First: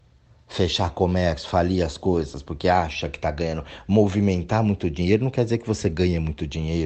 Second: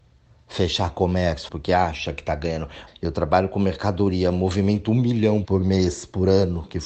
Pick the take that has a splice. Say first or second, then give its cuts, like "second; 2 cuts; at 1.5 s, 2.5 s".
second; 3 cuts; at 1.5 s, 2.9 s, 5.4 s